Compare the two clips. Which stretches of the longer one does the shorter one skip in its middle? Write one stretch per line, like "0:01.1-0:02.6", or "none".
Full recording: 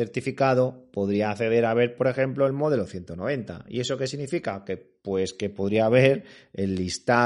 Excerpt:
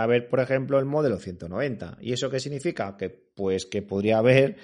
none